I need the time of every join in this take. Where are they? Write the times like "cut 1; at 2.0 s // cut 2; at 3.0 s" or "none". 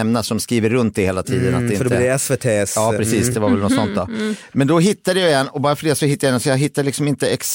none